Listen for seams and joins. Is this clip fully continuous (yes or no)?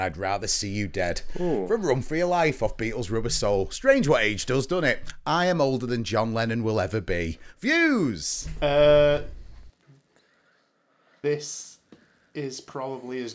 yes